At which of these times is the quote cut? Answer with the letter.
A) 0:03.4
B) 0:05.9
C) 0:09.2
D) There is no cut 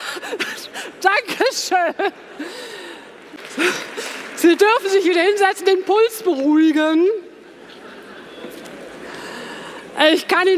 A